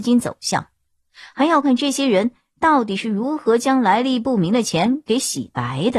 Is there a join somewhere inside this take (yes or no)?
yes